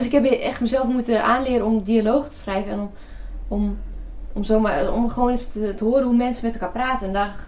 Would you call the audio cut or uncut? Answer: uncut